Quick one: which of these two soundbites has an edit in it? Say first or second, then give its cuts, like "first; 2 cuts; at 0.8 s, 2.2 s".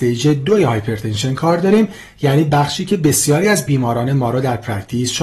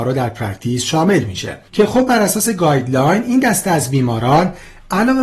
second; 1 cut; at 1.7 s